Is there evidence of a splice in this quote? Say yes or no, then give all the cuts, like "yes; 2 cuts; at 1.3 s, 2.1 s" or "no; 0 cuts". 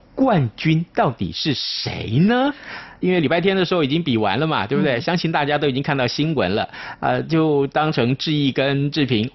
no; 0 cuts